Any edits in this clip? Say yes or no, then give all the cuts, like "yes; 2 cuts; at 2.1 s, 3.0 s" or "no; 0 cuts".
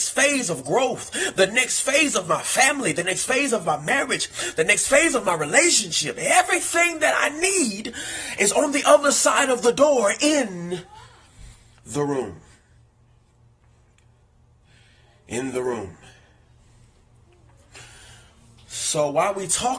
no; 0 cuts